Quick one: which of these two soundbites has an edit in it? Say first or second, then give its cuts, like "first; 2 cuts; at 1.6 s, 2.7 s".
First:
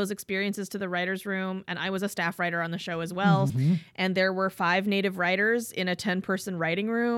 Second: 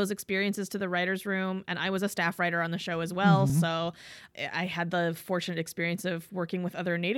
first; 1 cut; at 3.5 s